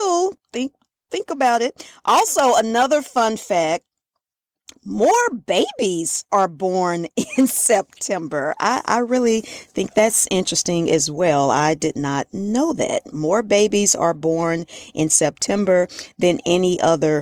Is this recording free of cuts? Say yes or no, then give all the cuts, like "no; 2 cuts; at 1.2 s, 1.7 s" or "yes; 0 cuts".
yes; 0 cuts